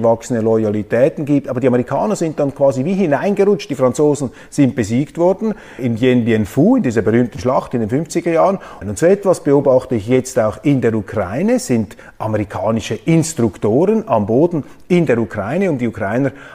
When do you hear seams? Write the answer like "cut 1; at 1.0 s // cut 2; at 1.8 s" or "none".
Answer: cut 1; at 5.8 s // cut 2; at 8.8 s